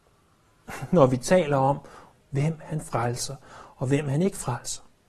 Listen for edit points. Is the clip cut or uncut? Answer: cut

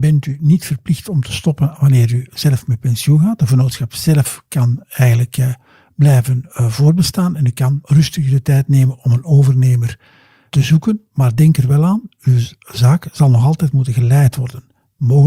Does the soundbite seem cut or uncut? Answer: uncut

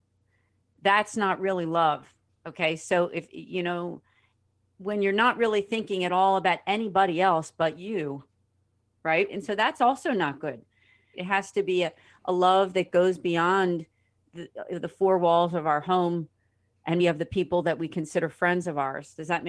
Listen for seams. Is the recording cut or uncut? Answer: cut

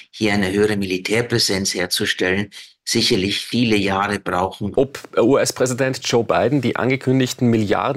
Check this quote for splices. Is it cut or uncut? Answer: cut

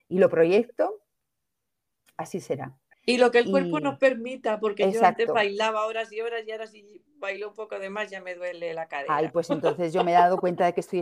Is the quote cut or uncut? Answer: cut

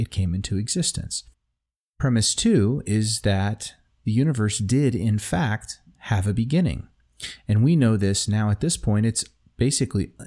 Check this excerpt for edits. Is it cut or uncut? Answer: uncut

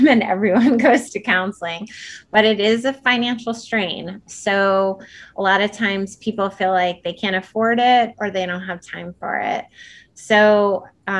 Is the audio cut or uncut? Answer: uncut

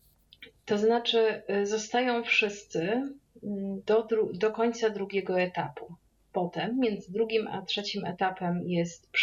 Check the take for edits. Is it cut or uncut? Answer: uncut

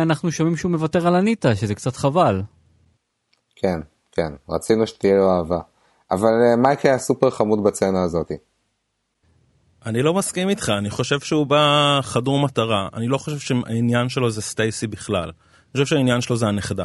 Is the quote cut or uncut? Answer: uncut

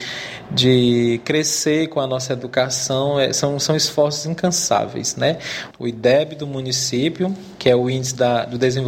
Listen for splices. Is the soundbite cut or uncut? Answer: cut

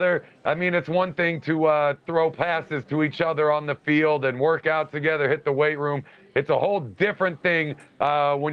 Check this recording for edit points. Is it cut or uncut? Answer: uncut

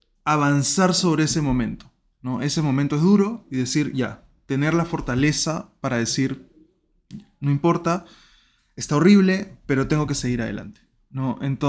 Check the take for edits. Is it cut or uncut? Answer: uncut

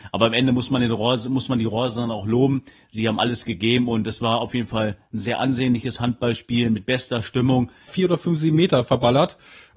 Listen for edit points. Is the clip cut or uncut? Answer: cut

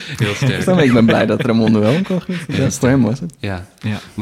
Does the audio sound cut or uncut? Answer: uncut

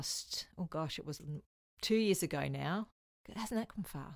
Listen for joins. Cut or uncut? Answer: uncut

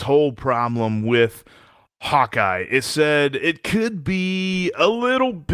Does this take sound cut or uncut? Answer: uncut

